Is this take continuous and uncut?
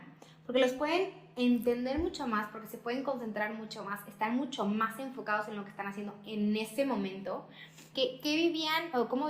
no; 1 cut; at 7.9 s

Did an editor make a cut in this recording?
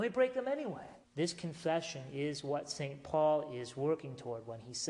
yes; 1 cut; at 1.1 s

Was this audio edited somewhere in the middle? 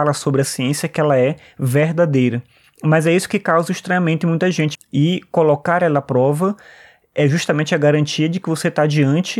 yes; 2 cuts; at 2.6 s, 4.7 s

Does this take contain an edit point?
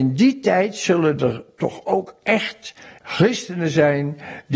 yes; 1 cut; at 3.0 s

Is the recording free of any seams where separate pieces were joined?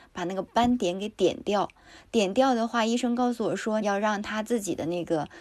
no; 1 cut; at 3.8 s

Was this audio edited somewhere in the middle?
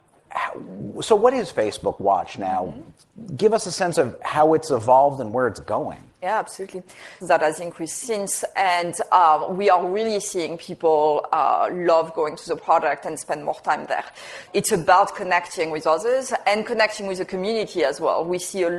yes; 2 cuts; at 7.2 s, 14.5 s

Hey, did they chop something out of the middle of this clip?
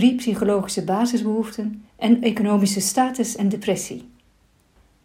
yes; 1 cut; at 1.9 s

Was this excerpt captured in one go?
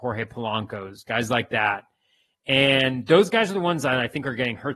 yes; 0 cuts

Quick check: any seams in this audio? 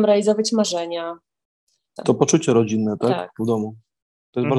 yes; 1 cut; at 2.0 s

